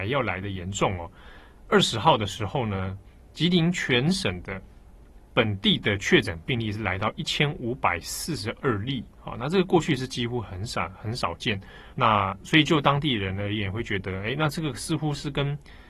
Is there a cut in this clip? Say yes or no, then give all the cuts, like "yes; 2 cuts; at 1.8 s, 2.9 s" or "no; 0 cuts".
yes; 1 cut; at 11.9 s